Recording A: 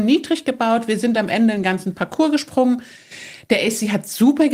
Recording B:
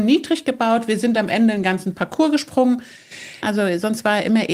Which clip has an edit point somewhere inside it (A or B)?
B